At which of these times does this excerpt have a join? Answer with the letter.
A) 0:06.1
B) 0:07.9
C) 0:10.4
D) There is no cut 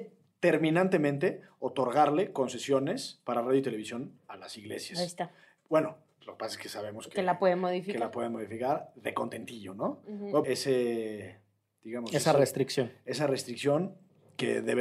C